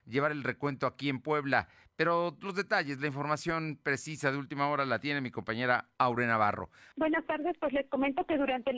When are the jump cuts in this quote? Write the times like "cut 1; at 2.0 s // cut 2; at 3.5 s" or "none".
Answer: cut 1; at 6.9 s